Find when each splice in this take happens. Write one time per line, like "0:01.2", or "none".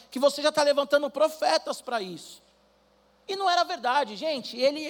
none

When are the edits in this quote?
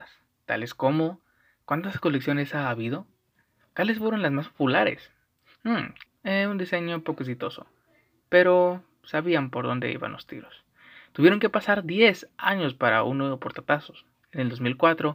0:06.1

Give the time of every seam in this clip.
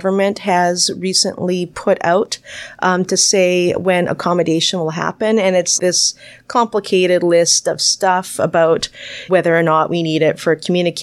0:05.8
0:09.3

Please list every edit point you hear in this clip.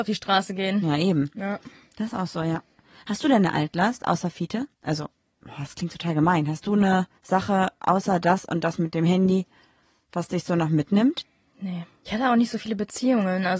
0:07.2
0:12.1

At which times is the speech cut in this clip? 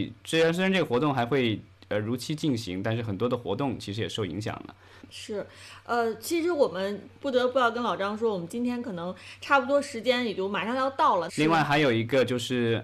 0:05.0
0:11.3

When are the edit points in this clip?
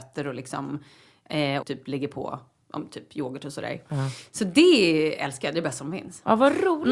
0:01.6

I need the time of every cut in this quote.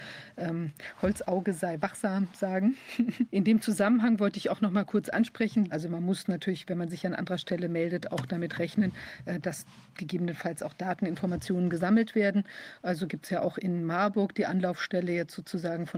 0:03.3
0:05.7

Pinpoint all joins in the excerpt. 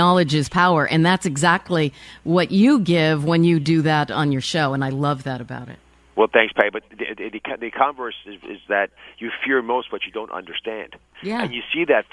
none

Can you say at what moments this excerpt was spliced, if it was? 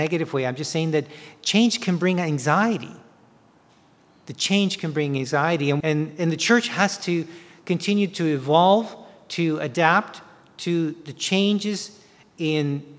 0:05.8

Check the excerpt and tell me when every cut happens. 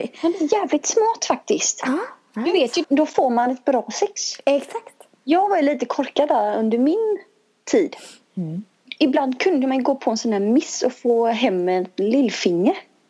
0:02.8

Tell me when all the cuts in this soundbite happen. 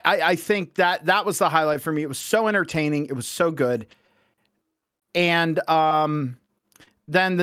none

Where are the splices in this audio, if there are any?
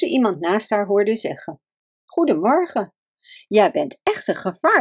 none

